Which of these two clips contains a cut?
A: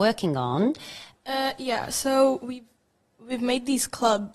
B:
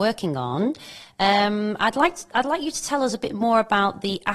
A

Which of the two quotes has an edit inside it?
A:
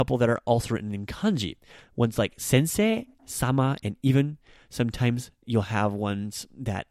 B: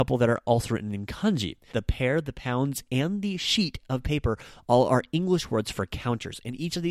B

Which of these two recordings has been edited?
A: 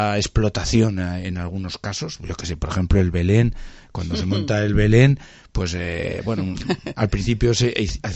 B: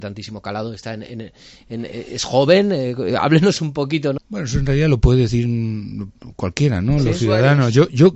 B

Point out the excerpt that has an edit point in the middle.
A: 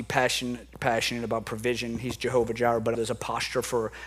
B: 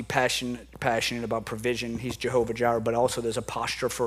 A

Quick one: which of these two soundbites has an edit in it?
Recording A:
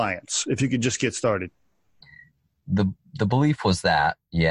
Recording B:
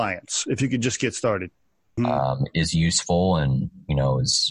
B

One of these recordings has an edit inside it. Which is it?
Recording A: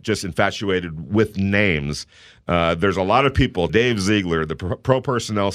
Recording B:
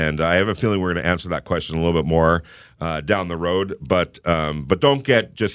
A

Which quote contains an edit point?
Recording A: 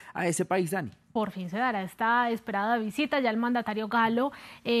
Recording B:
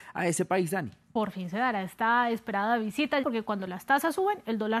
B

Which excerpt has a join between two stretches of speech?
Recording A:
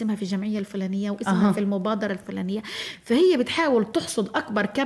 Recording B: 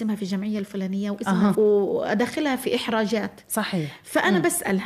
B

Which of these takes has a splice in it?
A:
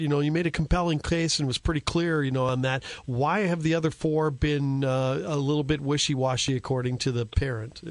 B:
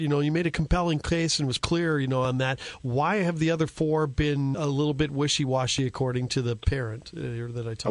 B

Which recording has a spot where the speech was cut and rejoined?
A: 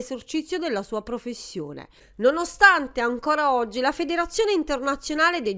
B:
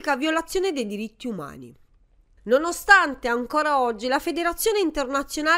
B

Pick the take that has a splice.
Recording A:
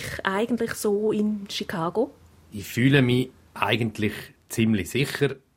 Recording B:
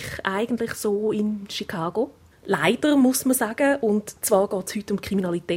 B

